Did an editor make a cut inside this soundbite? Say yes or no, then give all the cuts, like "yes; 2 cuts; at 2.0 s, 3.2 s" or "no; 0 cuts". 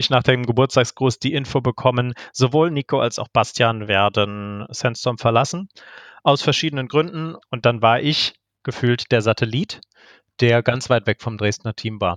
yes; 1 cut; at 7.4 s